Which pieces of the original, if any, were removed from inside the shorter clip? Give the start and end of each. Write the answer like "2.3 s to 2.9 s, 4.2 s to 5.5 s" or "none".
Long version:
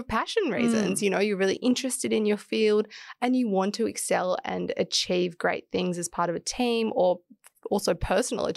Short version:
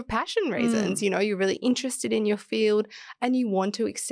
none